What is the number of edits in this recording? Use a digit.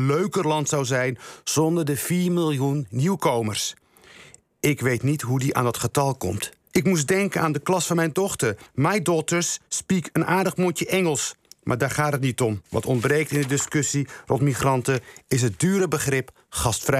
3